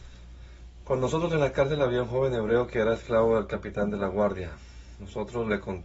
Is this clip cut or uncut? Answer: uncut